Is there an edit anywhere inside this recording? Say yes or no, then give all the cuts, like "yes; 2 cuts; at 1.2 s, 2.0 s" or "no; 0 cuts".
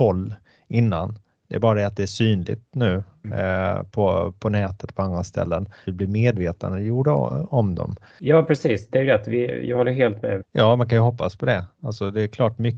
yes; 3 cuts; at 5.8 s, 8.1 s, 10.4 s